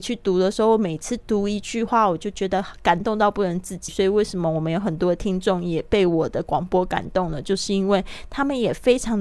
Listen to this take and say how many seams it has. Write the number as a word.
one